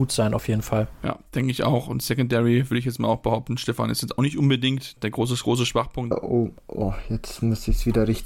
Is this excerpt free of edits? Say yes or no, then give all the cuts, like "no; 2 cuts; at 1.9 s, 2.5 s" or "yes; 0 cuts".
no; 2 cuts; at 5.0 s, 6.1 s